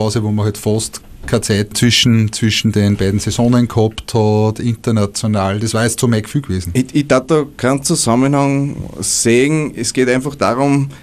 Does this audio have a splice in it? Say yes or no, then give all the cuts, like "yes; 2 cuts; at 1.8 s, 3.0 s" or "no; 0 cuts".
no; 0 cuts